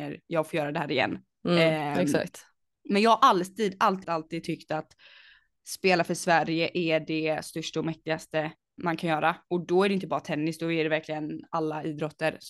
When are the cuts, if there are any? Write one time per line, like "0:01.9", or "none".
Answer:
0:04.0
0:08.8